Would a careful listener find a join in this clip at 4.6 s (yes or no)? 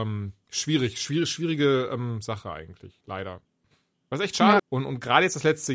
yes